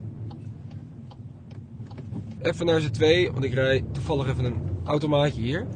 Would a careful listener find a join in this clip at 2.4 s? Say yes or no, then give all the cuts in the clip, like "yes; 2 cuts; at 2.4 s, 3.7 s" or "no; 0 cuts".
yes; 1 cut; at 2.4 s